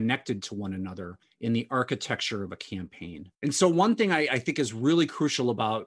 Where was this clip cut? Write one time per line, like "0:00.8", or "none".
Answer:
0:03.3